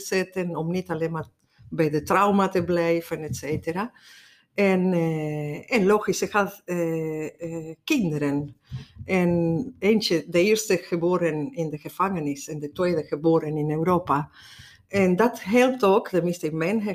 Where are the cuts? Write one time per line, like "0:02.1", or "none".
none